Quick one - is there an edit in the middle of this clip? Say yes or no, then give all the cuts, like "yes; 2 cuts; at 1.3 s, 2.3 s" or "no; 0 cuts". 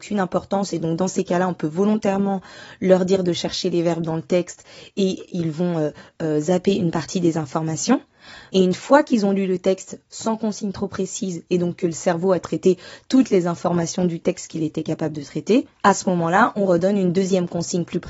yes; 2 cuts; at 8.5 s, 15.7 s